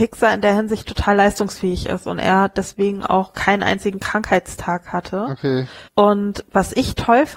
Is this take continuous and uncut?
no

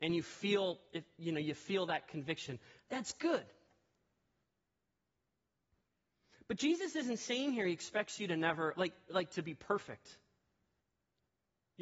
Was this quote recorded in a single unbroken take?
yes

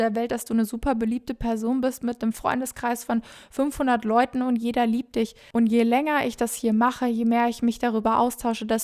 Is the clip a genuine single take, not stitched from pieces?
no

